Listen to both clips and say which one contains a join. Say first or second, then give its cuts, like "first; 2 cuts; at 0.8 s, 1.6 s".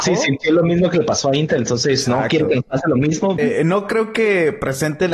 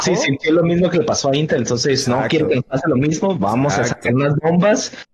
first; 1 cut; at 3.4 s